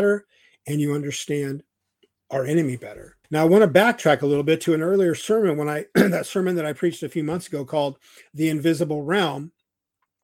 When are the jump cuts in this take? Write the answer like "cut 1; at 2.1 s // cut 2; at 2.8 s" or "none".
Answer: cut 1; at 2.1 s // cut 2; at 3.2 s